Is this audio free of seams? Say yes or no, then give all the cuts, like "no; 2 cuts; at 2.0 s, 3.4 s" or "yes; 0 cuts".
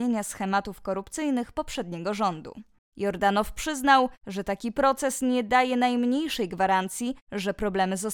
no; 1 cut; at 2.8 s